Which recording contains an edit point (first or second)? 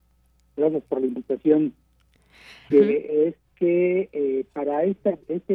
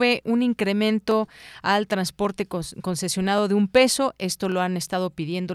first